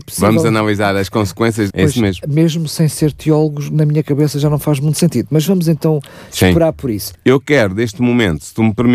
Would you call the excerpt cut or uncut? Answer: cut